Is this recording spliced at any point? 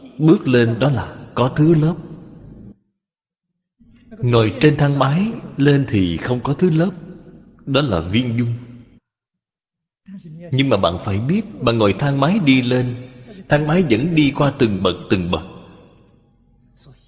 no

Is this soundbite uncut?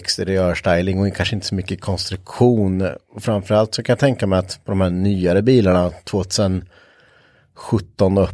yes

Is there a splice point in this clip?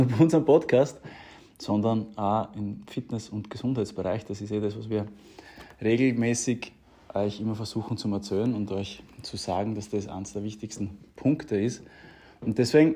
no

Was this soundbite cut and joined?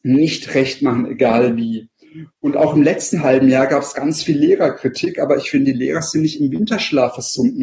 no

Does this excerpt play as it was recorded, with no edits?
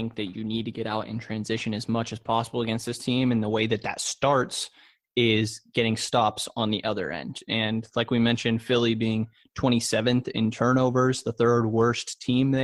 yes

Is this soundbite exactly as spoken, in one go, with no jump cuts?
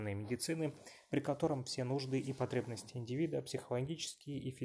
yes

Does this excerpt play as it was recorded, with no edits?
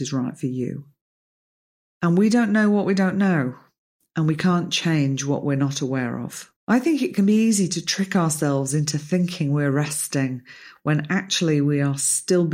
no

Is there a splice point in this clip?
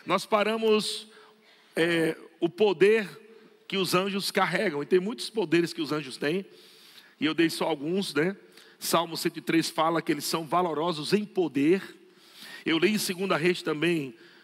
no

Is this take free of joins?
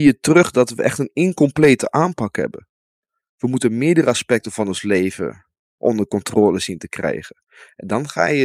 yes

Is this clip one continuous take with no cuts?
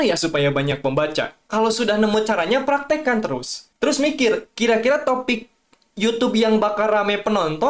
no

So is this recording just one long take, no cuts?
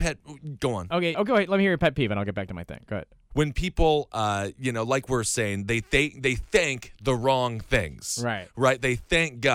no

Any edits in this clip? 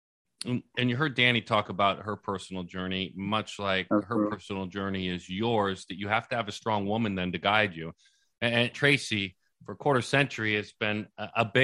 yes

